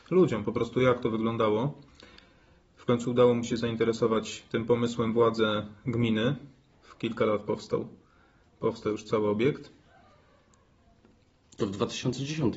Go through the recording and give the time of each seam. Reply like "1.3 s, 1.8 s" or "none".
6.7 s